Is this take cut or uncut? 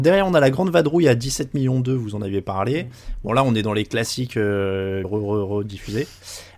cut